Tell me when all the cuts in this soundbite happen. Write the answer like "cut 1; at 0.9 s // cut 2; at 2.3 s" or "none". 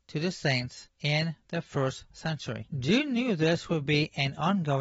cut 1; at 2.7 s